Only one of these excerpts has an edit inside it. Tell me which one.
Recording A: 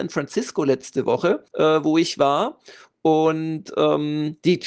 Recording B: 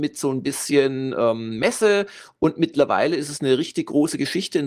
A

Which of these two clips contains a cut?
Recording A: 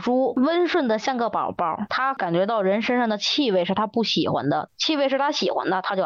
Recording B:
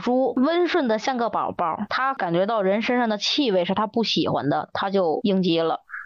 A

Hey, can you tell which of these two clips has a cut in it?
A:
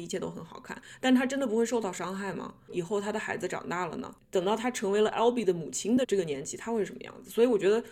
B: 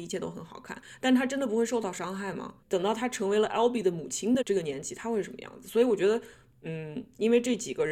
B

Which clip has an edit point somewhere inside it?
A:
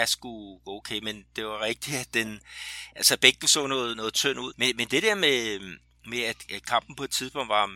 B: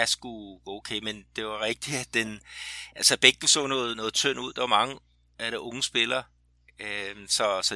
A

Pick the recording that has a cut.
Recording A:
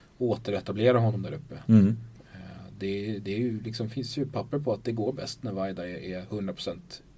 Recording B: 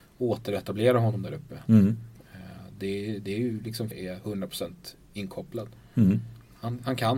B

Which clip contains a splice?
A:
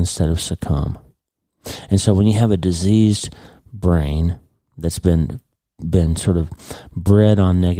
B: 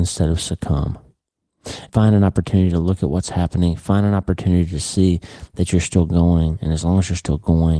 B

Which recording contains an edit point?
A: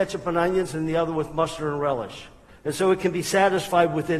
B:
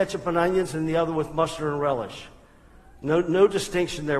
A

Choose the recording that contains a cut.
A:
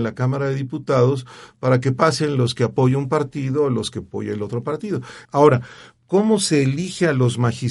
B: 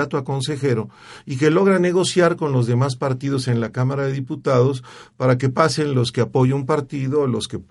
A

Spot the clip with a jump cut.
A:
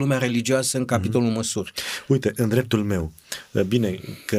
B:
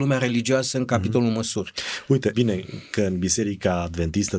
B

